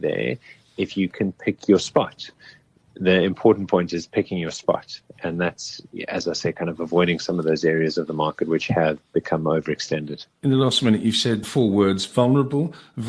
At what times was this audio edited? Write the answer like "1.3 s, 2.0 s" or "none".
10.3 s